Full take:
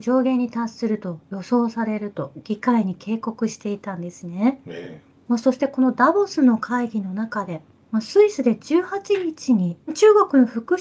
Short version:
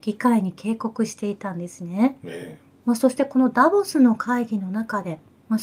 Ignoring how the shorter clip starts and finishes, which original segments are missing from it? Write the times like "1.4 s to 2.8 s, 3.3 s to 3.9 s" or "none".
none